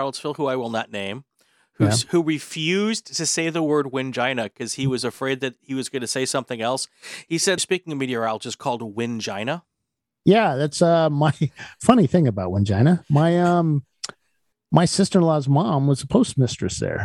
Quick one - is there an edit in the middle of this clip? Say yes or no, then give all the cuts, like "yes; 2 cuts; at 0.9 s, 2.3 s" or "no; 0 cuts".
yes; 1 cut; at 7.6 s